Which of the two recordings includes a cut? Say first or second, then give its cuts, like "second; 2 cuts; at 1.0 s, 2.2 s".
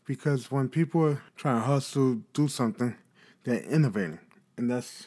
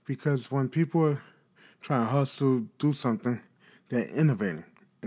first; 1 cut; at 1.3 s